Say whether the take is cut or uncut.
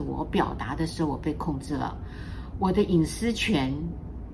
uncut